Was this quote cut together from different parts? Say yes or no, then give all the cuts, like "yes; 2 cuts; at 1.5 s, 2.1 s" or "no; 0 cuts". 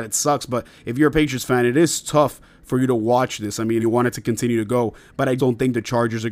yes; 2 cuts; at 3.8 s, 5.4 s